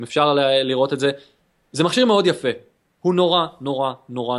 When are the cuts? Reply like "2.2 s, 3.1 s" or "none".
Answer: none

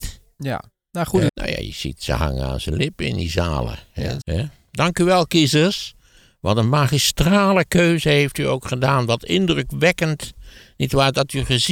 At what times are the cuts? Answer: 1.3 s, 4.2 s

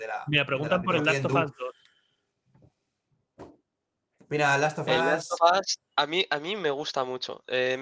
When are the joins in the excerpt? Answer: none

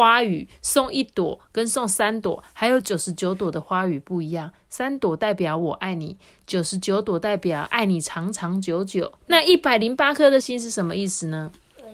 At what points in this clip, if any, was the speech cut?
9.2 s, 10.4 s

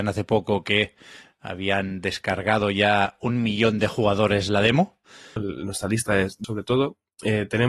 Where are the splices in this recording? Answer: 5.4 s, 6.4 s

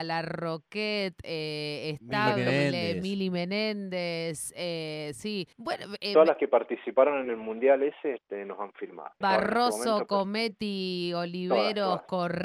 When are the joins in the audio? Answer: 5.5 s, 9.2 s

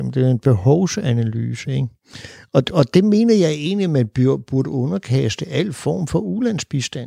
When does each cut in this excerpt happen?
none

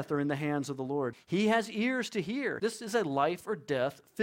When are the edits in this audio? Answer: 1.1 s, 2.6 s

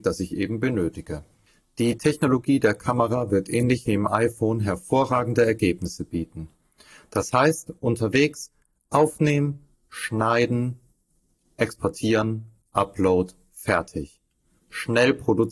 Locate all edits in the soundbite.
none

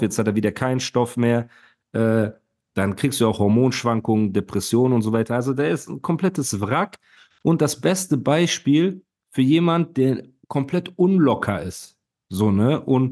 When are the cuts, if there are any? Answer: none

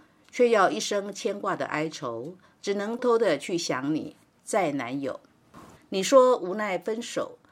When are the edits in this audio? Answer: 3.0 s, 5.8 s

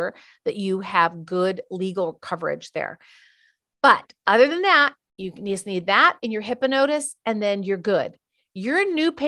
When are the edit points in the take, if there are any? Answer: none

